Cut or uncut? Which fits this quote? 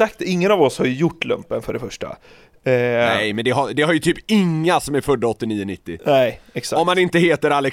uncut